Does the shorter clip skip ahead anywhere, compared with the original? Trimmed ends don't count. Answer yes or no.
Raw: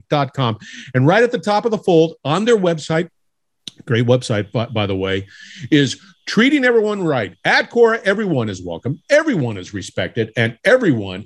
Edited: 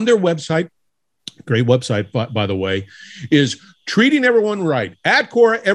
no